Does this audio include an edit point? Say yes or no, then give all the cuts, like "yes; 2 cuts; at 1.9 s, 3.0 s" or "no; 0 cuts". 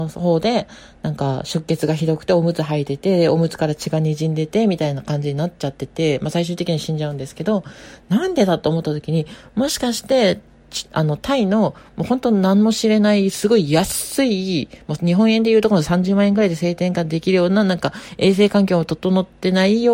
no; 0 cuts